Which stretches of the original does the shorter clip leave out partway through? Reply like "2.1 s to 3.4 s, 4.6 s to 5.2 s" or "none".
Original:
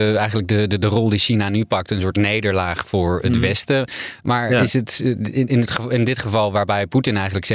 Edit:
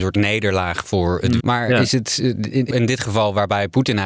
3.4 s to 4.2 s, 5.5 s to 5.9 s

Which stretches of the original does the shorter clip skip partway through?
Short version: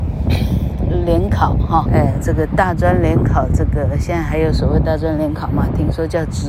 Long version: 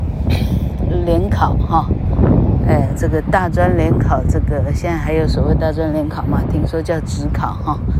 1.9 s to 2.6 s

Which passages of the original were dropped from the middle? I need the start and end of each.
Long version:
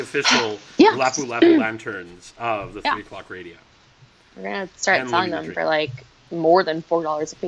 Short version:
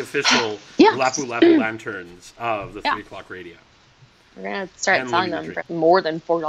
5.6 s to 6.2 s

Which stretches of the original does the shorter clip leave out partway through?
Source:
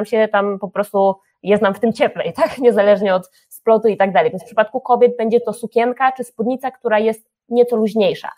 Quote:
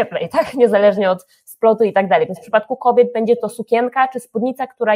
none

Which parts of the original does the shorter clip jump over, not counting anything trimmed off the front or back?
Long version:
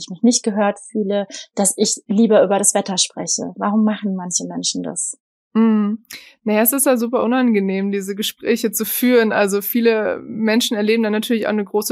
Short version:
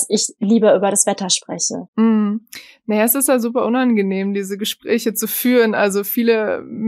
3.5 s to 5.4 s

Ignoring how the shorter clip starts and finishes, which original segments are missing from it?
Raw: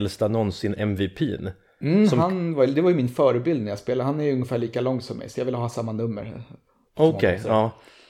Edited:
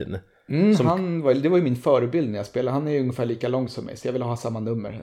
none

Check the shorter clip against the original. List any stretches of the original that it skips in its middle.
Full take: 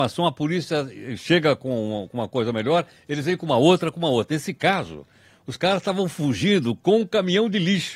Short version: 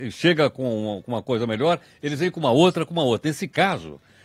none

